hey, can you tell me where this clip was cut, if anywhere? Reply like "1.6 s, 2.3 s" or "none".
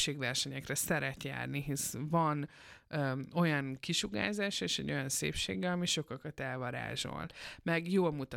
none